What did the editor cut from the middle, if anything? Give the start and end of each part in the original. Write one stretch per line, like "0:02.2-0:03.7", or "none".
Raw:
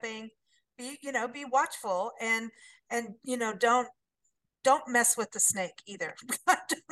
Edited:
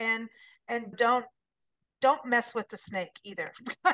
0:03.1-0:03.6